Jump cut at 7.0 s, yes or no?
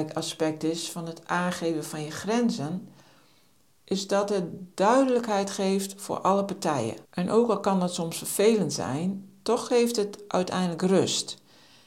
yes